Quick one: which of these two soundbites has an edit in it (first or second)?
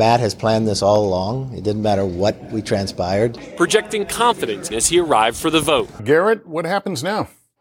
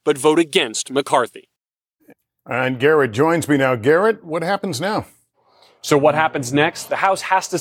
first